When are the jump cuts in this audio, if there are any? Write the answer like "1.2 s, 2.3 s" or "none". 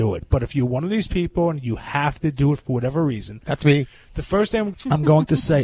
none